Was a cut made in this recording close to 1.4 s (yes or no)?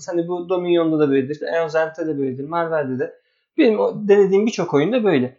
yes